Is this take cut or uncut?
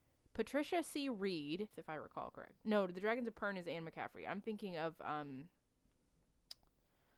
cut